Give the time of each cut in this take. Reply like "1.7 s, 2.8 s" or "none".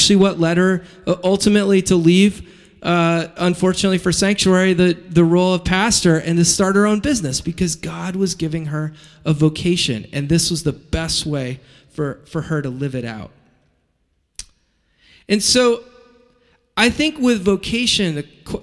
none